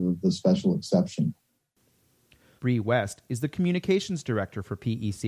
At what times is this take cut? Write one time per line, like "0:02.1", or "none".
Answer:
0:02.6